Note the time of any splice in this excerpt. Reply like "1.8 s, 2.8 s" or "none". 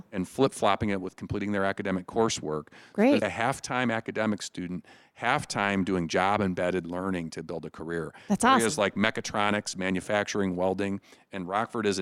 3.2 s